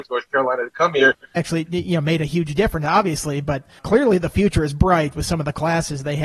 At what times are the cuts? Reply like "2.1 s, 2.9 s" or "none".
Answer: 1.4 s, 3.8 s